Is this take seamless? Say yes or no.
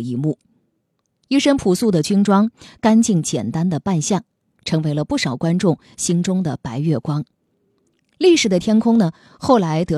yes